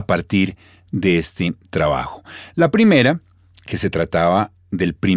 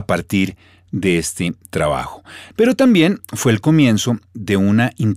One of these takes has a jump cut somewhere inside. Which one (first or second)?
second